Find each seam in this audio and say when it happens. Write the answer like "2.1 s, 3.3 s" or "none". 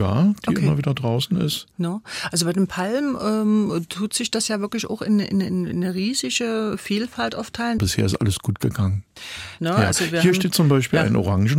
7.8 s, 9.6 s